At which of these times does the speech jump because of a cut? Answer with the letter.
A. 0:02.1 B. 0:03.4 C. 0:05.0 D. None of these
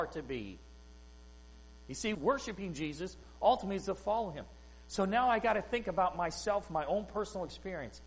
A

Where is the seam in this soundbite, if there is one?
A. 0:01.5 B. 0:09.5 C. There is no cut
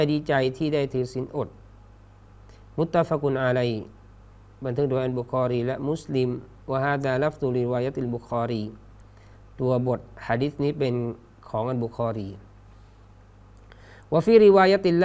C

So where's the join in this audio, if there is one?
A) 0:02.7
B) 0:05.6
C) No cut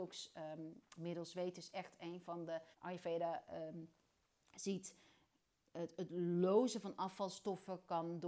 A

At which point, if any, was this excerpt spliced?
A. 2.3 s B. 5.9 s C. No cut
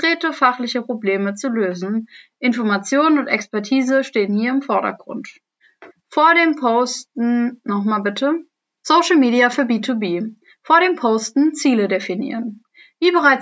B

